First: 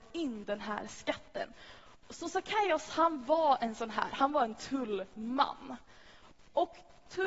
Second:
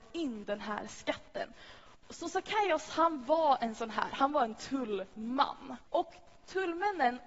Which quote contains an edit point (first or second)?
second